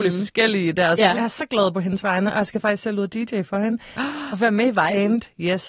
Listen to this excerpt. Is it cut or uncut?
cut